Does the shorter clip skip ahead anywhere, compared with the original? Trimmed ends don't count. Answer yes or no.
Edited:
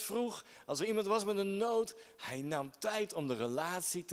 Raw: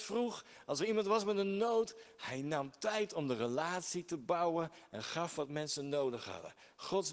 no